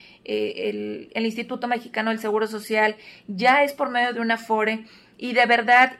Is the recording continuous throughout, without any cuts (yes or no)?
yes